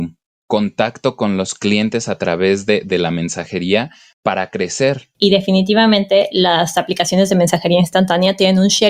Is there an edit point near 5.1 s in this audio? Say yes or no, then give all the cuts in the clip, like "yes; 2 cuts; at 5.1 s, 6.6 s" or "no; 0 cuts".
yes; 1 cut; at 5.1 s